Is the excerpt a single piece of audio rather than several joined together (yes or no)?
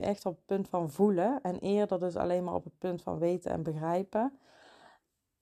yes